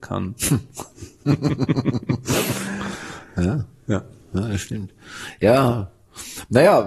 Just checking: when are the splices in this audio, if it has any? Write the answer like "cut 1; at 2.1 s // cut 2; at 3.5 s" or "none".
none